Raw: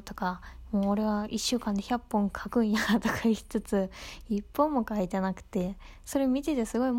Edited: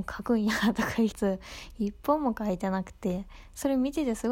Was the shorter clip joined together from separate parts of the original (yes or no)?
yes